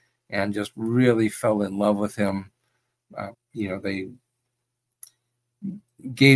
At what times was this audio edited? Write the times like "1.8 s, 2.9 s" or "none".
3.3 s